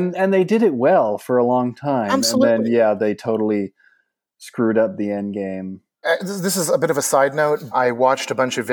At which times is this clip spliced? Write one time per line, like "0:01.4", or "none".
0:06.0
0:07.7